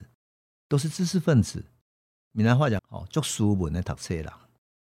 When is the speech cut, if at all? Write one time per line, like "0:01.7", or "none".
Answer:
0:02.8